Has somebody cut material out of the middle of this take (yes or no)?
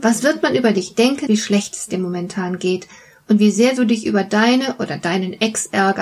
yes